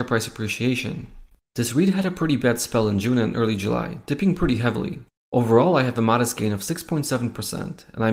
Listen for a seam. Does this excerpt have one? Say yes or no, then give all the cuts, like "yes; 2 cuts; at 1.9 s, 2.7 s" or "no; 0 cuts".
yes; 1 cut; at 5.2 s